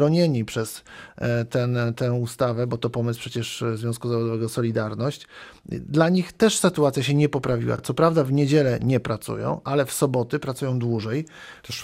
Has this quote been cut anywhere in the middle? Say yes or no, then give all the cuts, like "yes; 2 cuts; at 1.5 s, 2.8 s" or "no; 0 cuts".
no; 0 cuts